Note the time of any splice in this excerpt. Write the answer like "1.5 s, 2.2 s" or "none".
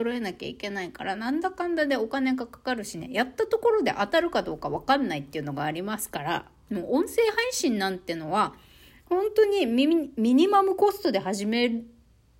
6.6 s